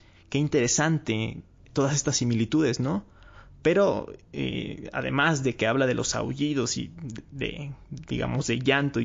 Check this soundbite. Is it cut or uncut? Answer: uncut